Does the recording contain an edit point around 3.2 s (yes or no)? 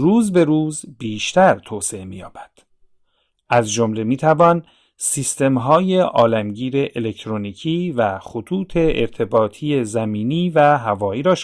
no